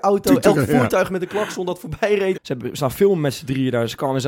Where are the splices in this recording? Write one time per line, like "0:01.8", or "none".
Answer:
0:02.3